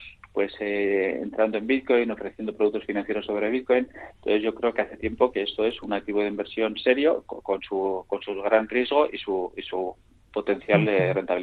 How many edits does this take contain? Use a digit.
0